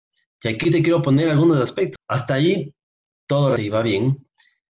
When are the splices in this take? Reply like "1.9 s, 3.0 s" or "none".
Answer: 2.0 s, 3.6 s